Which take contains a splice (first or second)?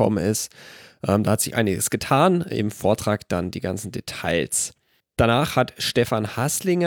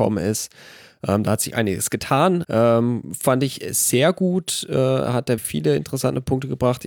second